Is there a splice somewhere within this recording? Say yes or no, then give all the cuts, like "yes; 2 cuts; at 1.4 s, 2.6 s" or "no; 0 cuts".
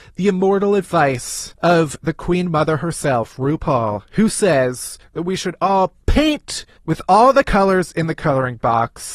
no; 0 cuts